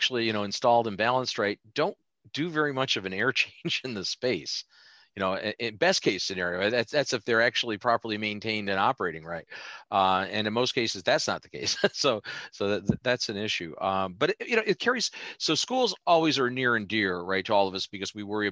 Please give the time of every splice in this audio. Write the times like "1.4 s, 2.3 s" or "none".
none